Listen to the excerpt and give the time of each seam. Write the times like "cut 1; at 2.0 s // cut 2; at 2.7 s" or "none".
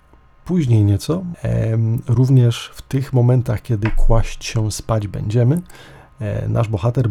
cut 1; at 1.3 s